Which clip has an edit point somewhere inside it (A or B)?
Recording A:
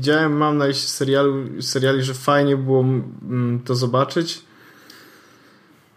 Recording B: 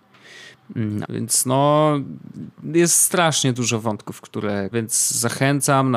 B